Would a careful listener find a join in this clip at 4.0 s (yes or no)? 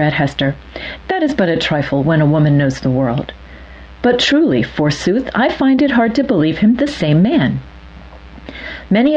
yes